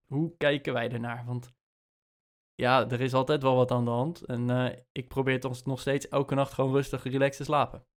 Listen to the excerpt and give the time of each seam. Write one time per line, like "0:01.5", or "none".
none

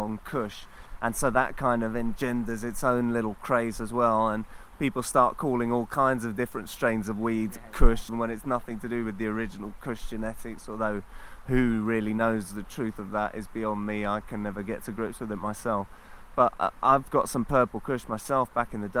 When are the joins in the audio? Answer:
0:08.1

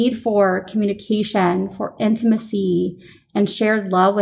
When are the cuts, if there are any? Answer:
none

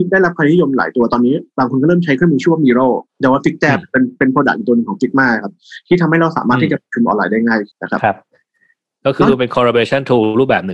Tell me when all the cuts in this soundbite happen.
0:03.1
0:07.7

